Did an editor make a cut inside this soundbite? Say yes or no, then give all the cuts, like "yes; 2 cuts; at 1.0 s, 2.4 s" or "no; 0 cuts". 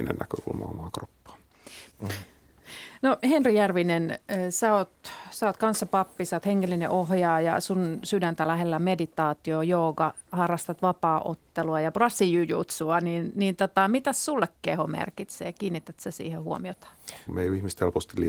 yes; 2 cuts; at 1.9 s, 17.3 s